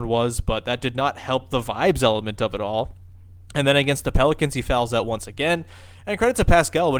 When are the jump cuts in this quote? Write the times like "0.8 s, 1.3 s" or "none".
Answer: none